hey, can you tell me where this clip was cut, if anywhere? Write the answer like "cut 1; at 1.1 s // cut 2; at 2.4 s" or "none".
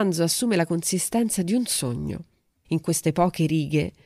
cut 1; at 2.6 s

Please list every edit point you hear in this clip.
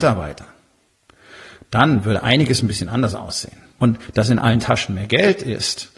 cut 1; at 3.8 s

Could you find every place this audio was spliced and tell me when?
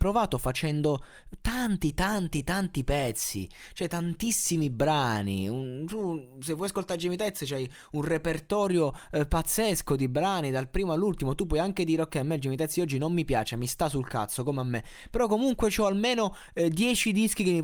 none

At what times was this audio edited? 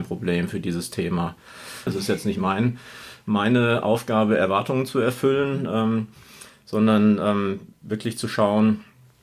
cut 1; at 1.9 s

